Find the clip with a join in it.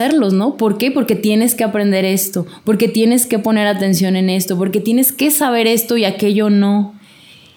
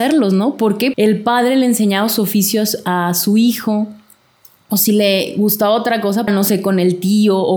second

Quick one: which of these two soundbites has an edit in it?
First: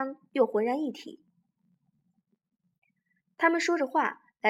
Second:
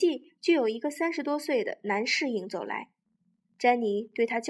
first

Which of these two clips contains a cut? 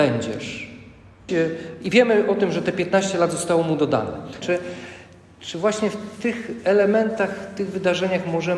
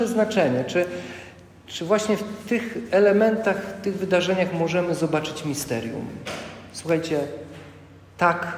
first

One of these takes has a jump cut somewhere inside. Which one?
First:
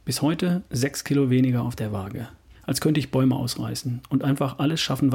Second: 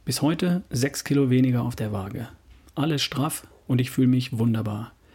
first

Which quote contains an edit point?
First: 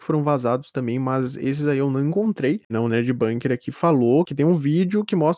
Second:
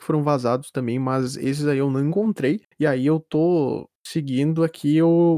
first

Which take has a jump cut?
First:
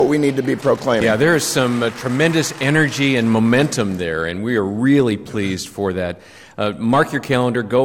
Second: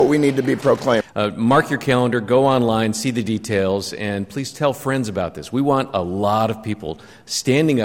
second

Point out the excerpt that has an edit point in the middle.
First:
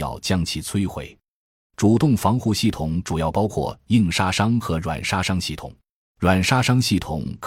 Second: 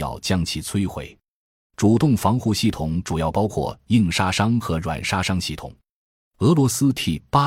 first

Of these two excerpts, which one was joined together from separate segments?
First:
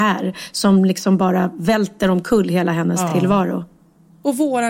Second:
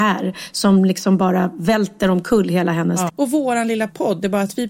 second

